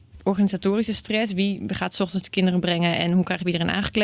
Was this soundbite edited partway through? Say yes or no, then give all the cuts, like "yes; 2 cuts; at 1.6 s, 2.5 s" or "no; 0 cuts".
no; 0 cuts